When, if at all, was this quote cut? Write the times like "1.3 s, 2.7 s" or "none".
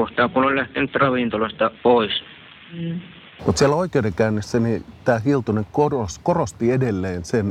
1.8 s, 3.4 s